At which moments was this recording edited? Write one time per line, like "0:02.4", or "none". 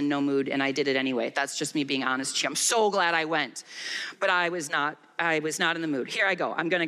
none